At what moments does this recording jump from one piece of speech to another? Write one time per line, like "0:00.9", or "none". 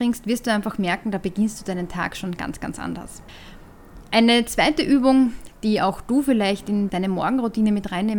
none